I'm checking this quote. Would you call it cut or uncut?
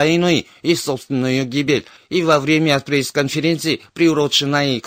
cut